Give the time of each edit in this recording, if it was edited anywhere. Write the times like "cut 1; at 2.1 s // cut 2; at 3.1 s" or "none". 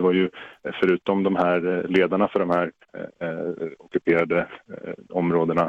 cut 1; at 2.8 s